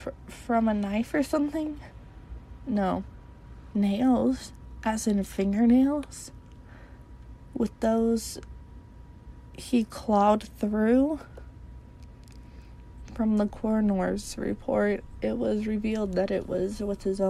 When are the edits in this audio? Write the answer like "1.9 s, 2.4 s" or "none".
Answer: 3.7 s